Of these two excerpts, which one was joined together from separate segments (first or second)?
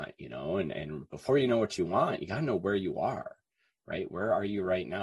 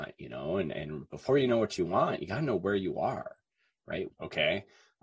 second